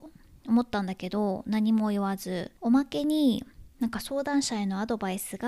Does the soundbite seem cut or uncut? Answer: cut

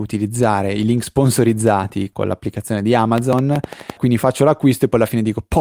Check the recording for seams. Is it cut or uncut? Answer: cut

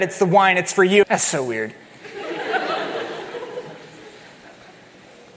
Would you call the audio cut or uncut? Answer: cut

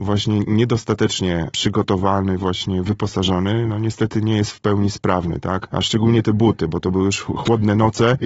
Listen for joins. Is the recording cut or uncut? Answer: uncut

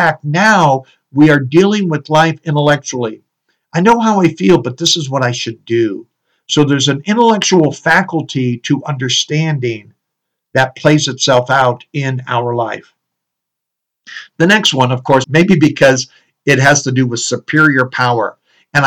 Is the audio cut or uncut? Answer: cut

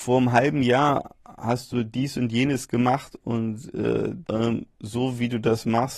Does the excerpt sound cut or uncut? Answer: cut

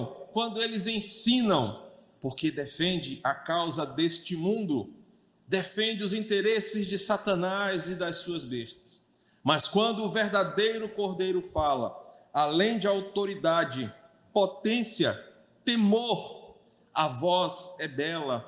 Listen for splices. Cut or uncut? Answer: cut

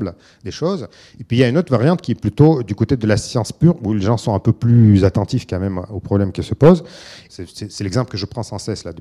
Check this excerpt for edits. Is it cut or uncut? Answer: cut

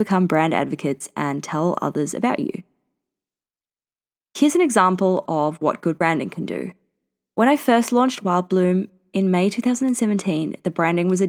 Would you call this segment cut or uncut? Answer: uncut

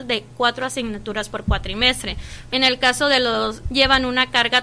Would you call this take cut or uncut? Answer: cut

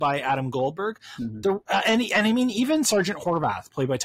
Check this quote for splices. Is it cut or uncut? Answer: uncut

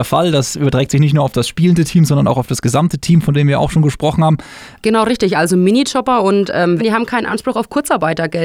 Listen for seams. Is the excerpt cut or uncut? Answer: cut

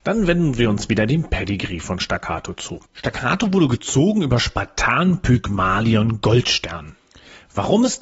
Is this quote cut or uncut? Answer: uncut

